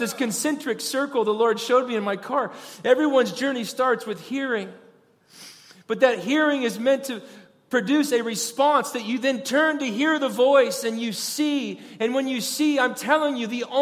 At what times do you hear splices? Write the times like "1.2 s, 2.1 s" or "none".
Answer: none